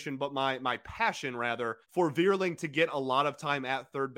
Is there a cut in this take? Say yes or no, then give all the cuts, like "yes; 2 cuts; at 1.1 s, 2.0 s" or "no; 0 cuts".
yes; 1 cut; at 1.8 s